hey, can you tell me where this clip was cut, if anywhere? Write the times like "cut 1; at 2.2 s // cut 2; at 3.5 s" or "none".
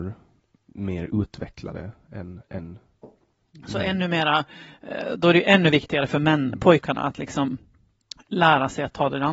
none